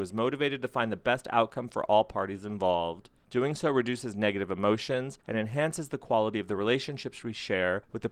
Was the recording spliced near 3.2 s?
no; 1 cut; at 5.2 s

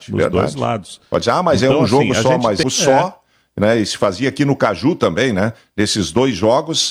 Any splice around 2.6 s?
yes; 1 cut; at 2.6 s

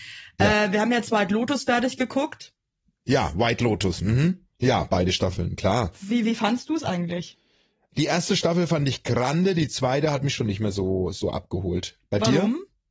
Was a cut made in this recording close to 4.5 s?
yes; 1 cut; at 4.5 s

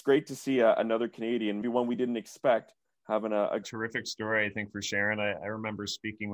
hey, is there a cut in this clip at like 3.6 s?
yes; 2 cuts; at 1.6 s, 3.6 s

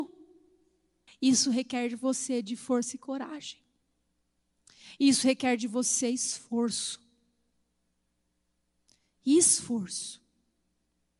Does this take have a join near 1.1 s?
yes; 1 cut; at 1.1 s

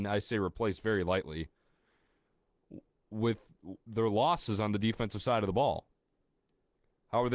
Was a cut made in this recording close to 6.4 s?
no; 0 cuts

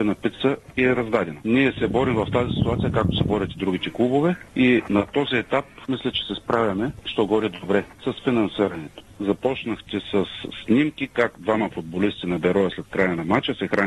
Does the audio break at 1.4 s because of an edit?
yes; 1 cut; at 1.4 s

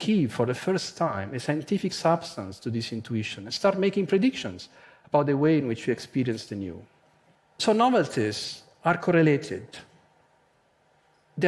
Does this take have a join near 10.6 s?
no; 0 cuts

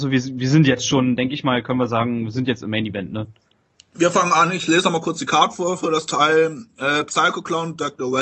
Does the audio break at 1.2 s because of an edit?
no; 0 cuts

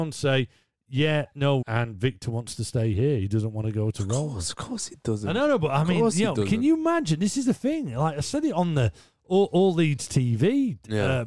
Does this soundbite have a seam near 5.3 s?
no; 1 cut; at 1.6 s

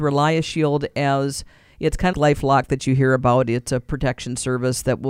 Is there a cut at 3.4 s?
no; 1 cut; at 2.1 s

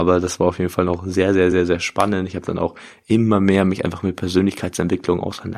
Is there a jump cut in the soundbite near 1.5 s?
no; 0 cuts

